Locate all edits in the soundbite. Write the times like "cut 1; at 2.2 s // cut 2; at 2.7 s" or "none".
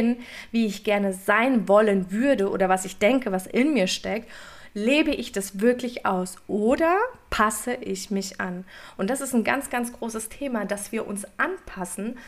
none